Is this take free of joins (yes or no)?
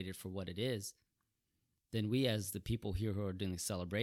yes